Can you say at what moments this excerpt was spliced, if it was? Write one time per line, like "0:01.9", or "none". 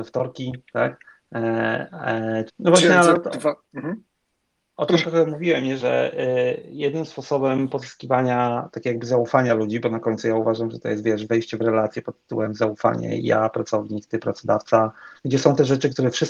0:02.5
0:05.8
0:15.2